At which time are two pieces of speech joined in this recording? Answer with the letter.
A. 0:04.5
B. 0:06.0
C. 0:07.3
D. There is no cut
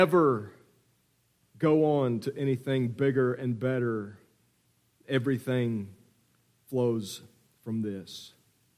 D